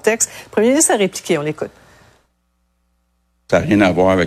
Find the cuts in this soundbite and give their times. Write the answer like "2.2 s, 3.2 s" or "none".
none